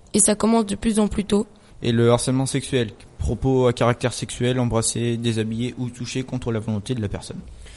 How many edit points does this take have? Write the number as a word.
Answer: one